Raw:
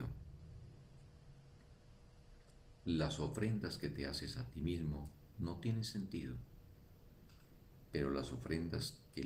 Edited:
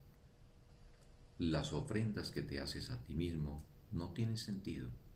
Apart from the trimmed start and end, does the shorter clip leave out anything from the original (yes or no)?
no